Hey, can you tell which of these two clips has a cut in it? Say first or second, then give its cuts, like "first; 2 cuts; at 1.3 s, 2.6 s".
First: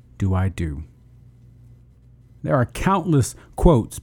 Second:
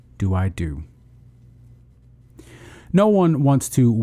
first; 1 cut; at 2.3 s